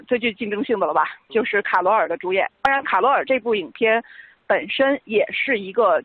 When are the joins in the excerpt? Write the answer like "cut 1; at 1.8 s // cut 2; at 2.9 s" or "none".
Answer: none